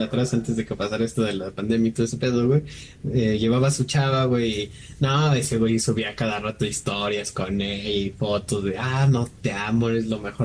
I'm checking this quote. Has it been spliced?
no; 0 cuts

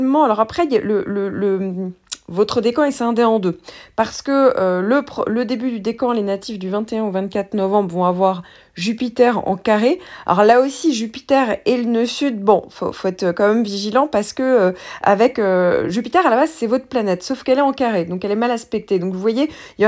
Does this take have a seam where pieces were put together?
no; 0 cuts

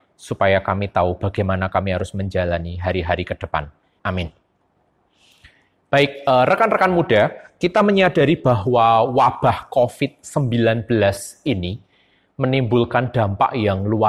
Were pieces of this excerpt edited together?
yes; 1 cut; at 4.0 s

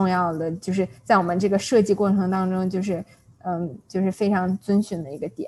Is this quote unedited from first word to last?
yes; 0 cuts

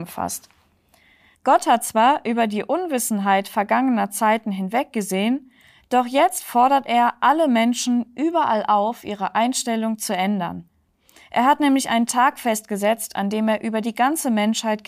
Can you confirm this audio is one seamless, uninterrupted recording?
yes; 0 cuts

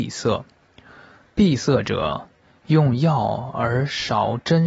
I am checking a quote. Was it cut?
no; 0 cuts

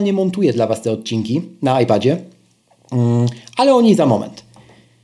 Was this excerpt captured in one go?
yes; 0 cuts

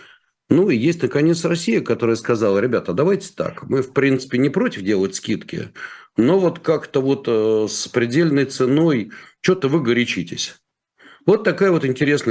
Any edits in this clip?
no; 0 cuts

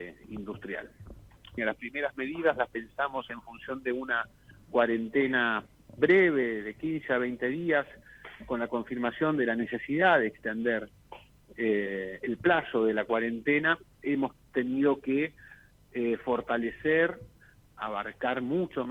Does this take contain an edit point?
yes; 2 cuts; at 1.6 s, 17.7 s

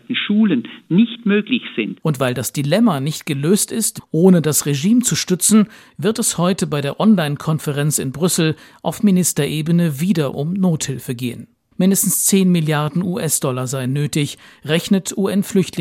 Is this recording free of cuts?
no; 2 cuts; at 2.0 s, 4.0 s

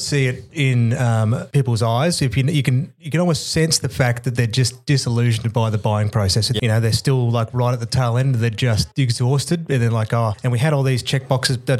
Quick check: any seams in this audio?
yes; 1 cut; at 6.6 s

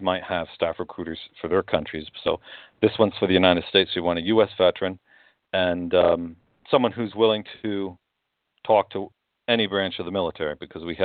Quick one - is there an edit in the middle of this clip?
no; 0 cuts

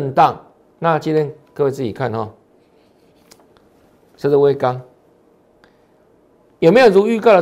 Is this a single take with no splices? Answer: yes; 0 cuts

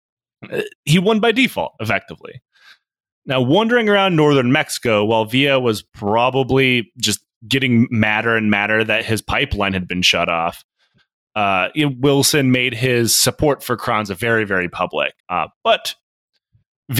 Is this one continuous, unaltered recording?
no; 1 cut; at 15.2 s

